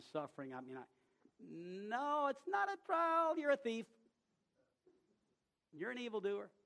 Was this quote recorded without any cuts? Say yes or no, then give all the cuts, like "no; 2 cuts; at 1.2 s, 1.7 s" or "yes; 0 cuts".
no; 1 cut; at 1.3 s